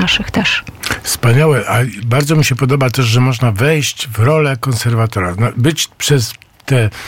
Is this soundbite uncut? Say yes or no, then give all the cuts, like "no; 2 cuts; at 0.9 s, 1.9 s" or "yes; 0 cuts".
yes; 0 cuts